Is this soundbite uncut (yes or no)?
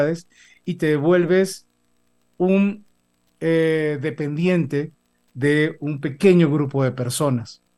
yes